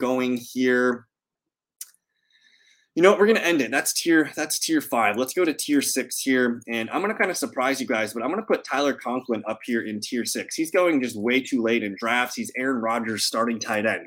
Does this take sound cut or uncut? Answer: uncut